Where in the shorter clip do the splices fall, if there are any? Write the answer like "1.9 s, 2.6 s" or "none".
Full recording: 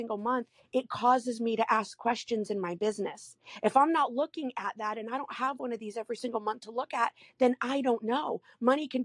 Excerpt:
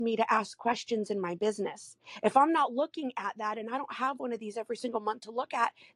none